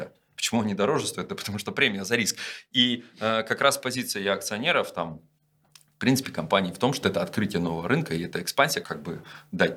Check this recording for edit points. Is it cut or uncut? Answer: cut